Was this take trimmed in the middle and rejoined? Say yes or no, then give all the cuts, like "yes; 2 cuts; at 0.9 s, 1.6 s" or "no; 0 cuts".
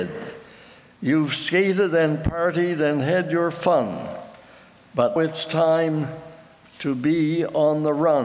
yes; 1 cut; at 5.2 s